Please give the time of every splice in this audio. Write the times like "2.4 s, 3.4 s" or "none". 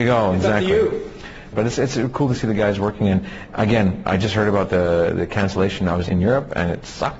1.5 s, 6.1 s